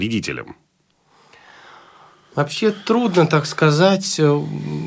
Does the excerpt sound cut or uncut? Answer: uncut